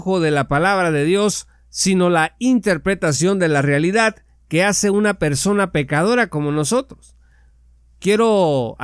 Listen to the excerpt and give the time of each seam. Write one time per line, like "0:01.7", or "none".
none